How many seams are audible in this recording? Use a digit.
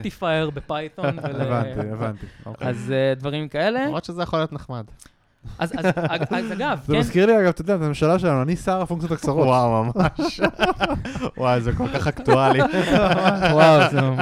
0